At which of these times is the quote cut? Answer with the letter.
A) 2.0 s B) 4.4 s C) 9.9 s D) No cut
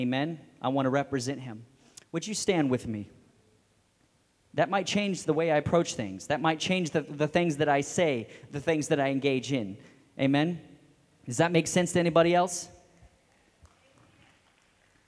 B